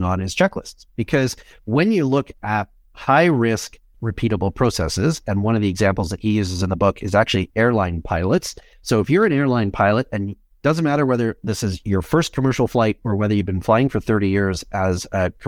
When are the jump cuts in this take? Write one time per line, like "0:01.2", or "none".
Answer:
0:03.9